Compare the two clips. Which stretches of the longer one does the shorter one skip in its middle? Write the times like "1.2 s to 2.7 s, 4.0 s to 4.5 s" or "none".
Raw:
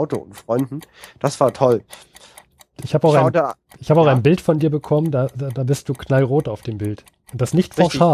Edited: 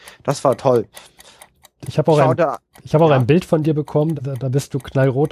5.1 s to 5.3 s